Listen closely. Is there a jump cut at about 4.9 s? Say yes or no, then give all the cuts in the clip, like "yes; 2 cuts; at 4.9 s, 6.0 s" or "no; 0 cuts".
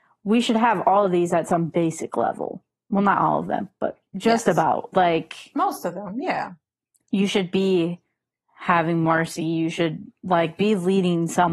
yes; 1 cut; at 4.9 s